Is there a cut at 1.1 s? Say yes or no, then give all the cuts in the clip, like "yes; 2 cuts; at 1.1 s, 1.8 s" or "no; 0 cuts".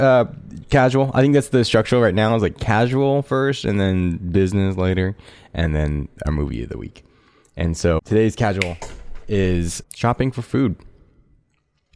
no; 2 cuts; at 8.0 s, 9.8 s